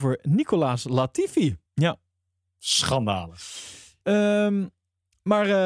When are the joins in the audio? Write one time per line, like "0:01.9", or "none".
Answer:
0:01.7
0:04.0